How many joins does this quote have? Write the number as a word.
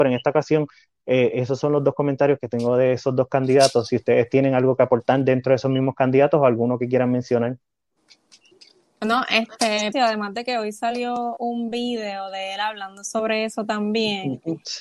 one